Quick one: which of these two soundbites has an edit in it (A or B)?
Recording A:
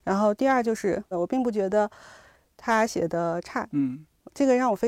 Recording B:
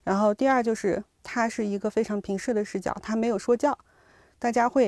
A